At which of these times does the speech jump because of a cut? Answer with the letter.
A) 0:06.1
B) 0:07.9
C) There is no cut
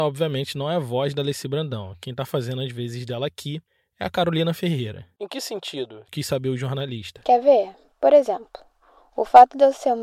C